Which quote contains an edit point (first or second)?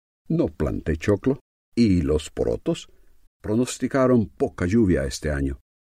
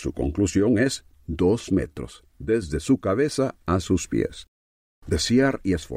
first